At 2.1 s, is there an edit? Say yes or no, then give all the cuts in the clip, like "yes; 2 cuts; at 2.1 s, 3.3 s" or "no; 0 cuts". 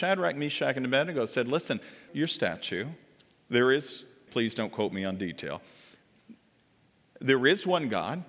yes; 2 cuts; at 2.1 s, 4.3 s